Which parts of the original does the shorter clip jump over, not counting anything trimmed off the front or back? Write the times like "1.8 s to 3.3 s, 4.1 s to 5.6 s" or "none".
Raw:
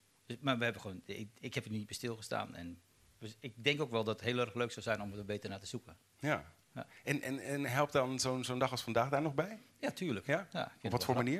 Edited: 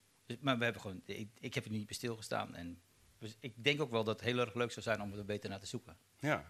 none

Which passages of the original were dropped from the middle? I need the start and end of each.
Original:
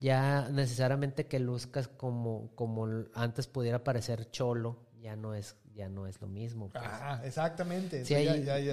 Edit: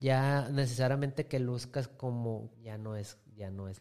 2.5 s to 4.9 s

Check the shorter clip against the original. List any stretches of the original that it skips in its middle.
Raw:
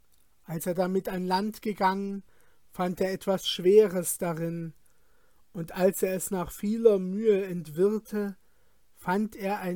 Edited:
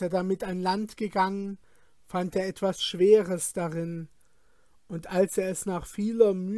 none

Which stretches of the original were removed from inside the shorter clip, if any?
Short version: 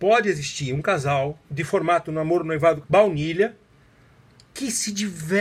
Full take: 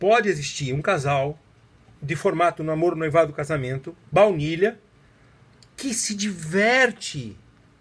1.4 s to 2.0 s, 3.3 s to 4.1 s

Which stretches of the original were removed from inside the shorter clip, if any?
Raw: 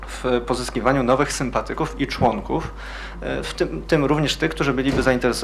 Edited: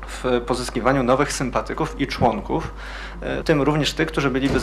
3.4 s to 3.8 s

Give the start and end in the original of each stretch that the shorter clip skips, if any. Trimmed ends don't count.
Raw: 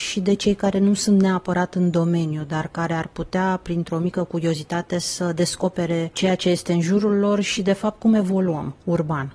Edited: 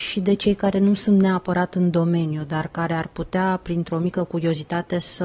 none

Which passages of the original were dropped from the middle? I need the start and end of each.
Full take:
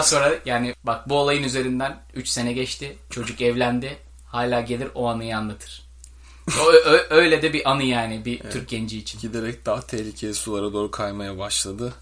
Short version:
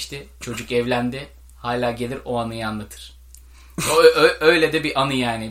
none

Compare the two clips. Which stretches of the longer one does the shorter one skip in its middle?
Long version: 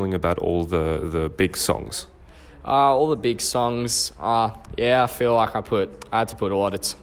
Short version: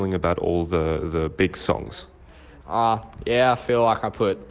2.6 s to 4.1 s

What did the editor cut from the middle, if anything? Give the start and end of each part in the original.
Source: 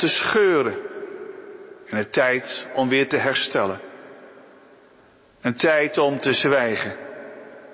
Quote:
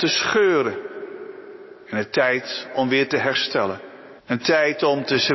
4.2 s to 5.3 s

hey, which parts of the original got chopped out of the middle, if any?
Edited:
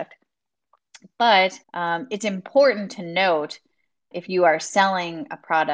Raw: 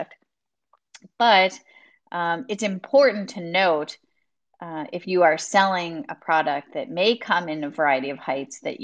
1.6 s to 2.0 s, 4.5 s to 4.9 s

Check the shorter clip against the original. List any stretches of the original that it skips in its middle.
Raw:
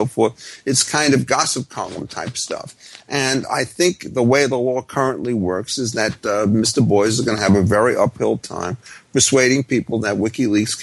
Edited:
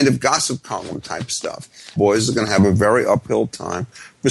3.0 s to 6.9 s

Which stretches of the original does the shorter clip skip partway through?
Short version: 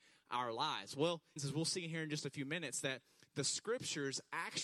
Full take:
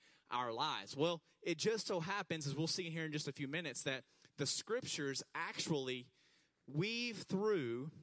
1.4 s to 2.4 s

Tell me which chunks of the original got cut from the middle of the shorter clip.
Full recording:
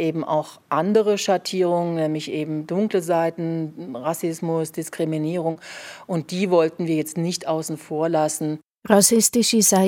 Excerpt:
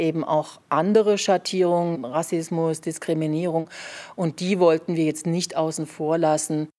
1.9 s to 3.9 s

